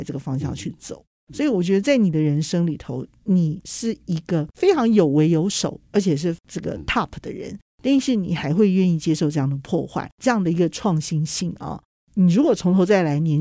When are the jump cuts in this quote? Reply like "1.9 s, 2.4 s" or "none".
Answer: none